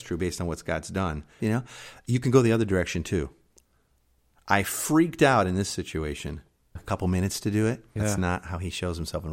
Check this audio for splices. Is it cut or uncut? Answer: cut